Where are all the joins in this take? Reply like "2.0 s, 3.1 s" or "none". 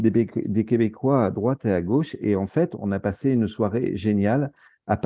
none